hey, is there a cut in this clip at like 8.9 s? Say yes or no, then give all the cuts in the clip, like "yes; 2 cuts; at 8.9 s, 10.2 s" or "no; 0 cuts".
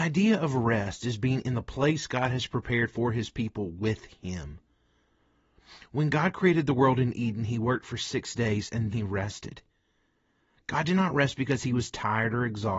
yes; 1 cut; at 8.9 s